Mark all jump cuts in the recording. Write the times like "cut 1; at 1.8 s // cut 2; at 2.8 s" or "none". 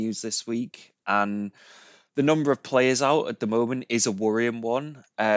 none